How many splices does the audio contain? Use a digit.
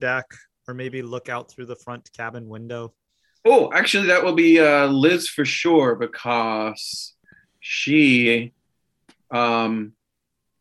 0